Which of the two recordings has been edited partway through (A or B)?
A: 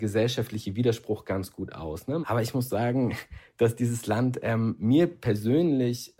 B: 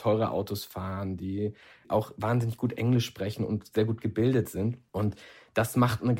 A